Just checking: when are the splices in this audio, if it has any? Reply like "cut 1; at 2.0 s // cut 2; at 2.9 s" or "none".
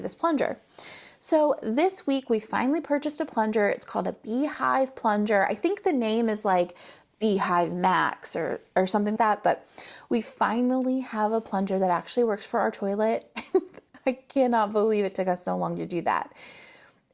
cut 1; at 9.2 s